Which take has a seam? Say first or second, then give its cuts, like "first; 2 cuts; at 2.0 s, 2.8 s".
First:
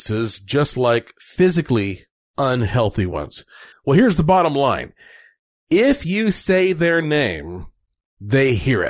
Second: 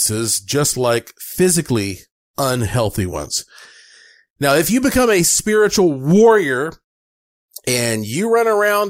first; 2 cuts; at 3.7 s, 5.5 s